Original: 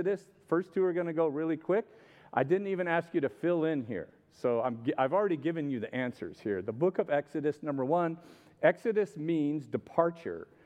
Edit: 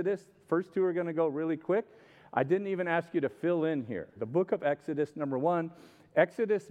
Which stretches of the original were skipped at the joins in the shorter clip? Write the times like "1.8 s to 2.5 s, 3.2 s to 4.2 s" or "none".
4.2 s to 6.6 s

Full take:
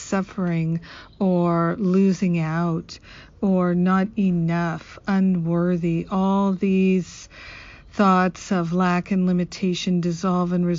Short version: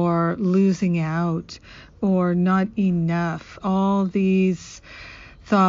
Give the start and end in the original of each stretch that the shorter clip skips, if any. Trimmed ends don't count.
5.0 s to 6.1 s

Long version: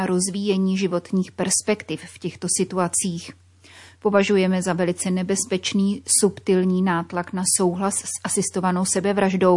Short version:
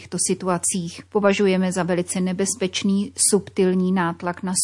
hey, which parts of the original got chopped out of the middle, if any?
3.4 s to 4.0 s

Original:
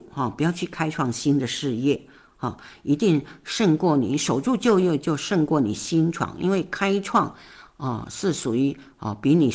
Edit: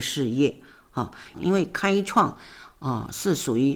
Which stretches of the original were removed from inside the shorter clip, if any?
2.8 s to 6.3 s

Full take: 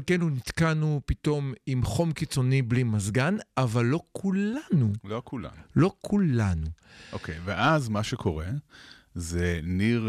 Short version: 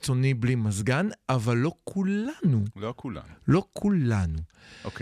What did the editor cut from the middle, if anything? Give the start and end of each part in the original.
none

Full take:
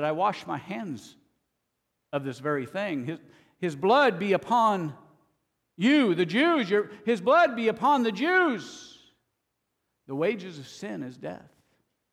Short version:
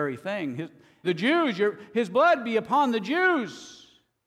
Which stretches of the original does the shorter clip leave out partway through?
3.5 s to 6.2 s

